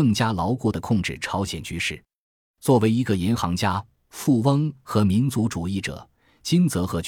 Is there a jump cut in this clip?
no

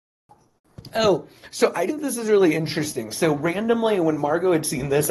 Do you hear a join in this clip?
yes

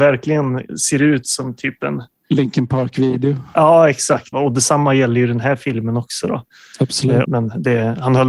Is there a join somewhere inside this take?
yes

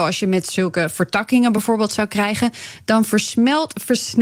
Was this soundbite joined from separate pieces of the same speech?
no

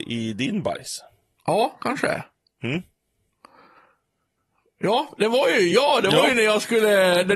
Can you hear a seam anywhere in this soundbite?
no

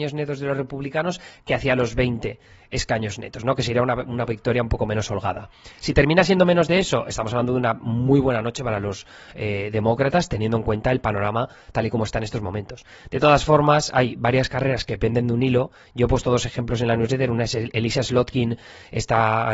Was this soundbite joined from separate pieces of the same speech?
no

